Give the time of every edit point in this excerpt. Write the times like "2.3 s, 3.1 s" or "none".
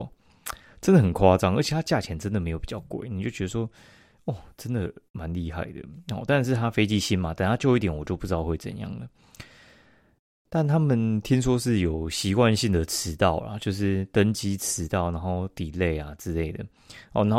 none

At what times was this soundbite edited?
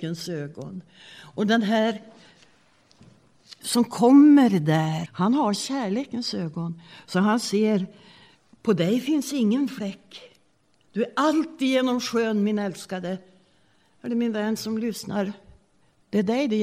5.1 s

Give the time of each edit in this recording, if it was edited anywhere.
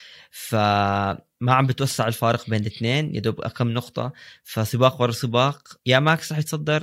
5.8 s

